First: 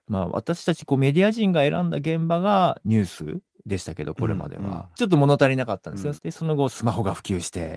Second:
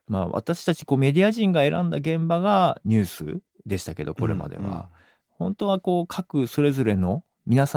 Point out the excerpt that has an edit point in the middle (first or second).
first